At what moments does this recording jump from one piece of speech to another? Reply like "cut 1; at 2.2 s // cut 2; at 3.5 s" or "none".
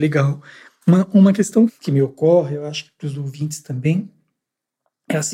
cut 1; at 1.7 s